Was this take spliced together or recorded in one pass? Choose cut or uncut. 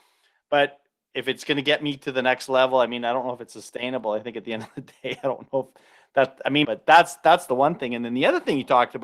cut